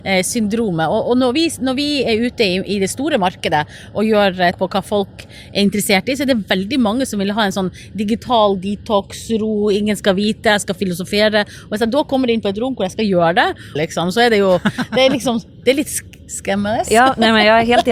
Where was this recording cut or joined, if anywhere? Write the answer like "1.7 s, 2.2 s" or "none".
4.5 s, 13.8 s